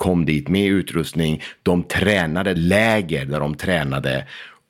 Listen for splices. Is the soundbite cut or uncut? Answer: cut